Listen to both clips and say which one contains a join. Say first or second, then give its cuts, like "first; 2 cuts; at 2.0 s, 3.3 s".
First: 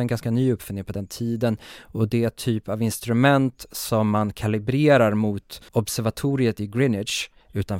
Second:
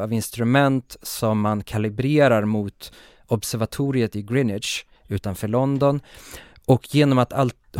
first; 1 cut; at 5.7 s